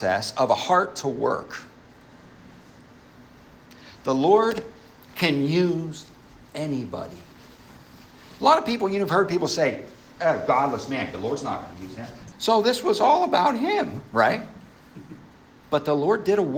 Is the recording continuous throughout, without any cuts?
no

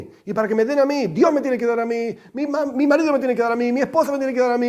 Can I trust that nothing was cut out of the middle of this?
yes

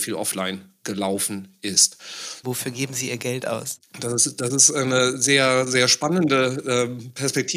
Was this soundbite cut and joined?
yes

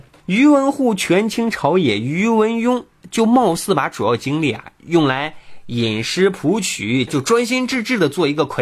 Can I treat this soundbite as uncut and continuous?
no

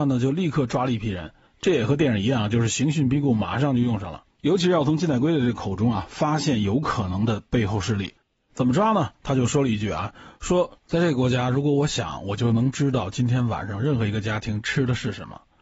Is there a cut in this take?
yes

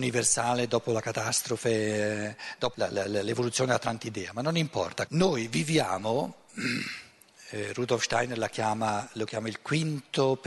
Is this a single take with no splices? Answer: no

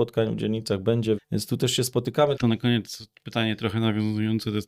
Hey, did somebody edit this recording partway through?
yes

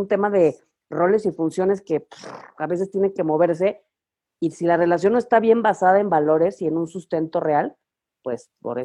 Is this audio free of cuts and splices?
yes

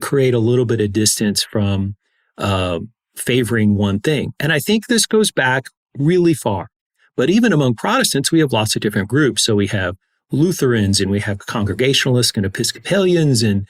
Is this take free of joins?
no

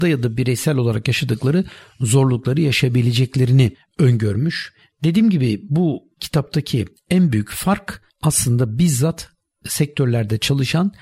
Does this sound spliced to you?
no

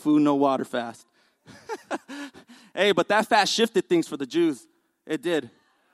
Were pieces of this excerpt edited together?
no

